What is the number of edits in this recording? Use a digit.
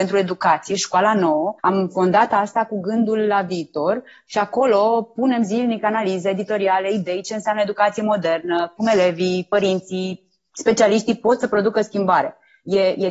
2